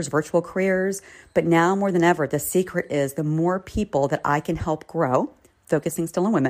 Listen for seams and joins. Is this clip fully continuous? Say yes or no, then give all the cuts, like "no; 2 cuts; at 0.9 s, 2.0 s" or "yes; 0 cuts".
yes; 0 cuts